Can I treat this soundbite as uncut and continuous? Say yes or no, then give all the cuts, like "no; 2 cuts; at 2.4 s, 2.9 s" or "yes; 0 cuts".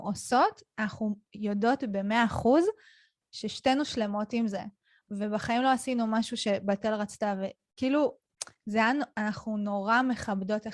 yes; 0 cuts